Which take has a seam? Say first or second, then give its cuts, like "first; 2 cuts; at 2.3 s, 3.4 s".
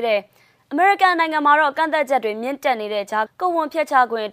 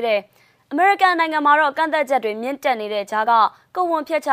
first; 1 cut; at 3.3 s